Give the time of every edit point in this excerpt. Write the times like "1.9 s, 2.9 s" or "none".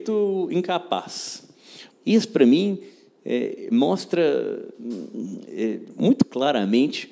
1.9 s